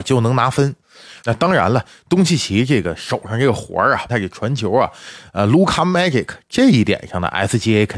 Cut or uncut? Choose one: cut